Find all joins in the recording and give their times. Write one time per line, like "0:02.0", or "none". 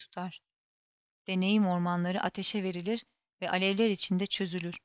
0:01.1

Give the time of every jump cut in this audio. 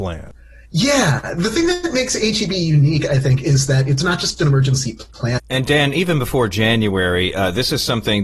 0:05.4

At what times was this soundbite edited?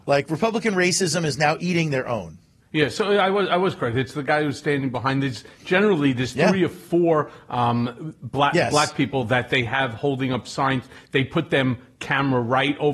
none

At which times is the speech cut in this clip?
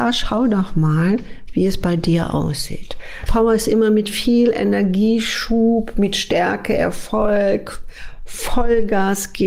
0:03.3

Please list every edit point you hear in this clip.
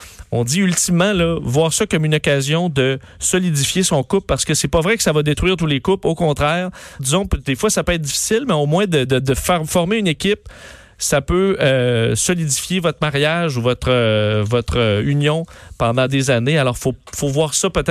0:07.0

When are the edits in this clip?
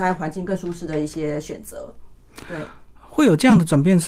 none

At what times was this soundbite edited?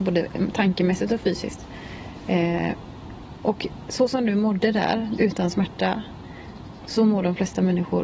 0:05.2

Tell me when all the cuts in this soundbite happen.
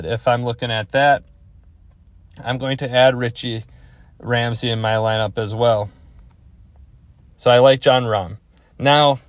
0:07.3

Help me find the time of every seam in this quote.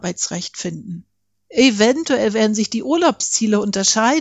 0:01.3

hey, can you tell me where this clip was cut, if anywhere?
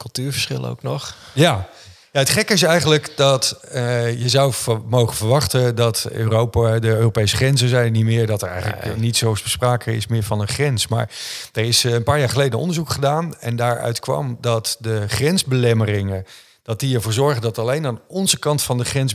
none

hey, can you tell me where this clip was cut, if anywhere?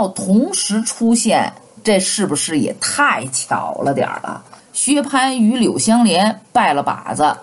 0:04.6

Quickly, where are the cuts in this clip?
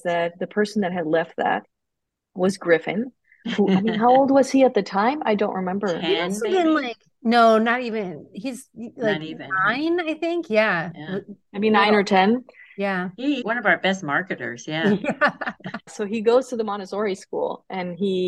0:13.4
0:15.9

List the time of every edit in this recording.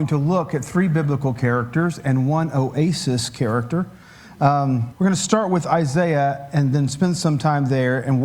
0:04.9

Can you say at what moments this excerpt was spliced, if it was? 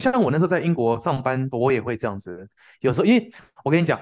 0:01.5

